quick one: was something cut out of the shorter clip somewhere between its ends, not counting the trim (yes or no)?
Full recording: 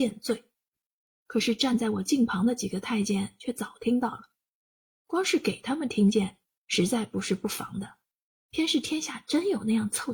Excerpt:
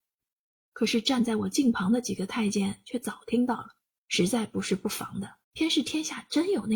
yes